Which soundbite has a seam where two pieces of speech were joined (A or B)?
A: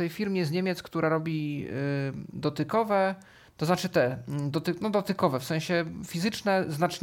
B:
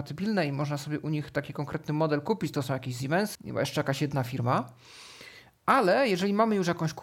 B